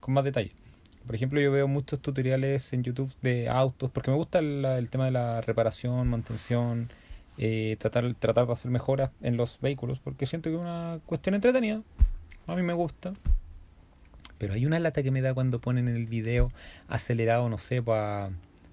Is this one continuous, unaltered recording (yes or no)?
yes